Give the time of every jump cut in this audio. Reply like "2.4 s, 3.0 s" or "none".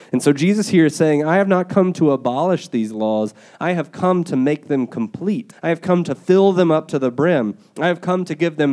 5.5 s